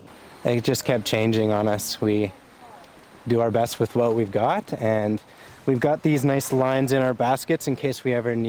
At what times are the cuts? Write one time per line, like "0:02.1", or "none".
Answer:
none